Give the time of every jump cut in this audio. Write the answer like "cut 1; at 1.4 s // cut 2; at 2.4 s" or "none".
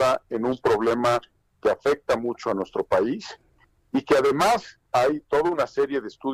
cut 1; at 4.9 s